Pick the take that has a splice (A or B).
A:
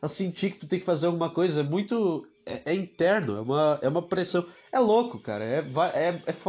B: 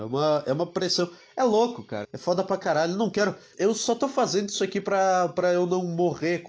B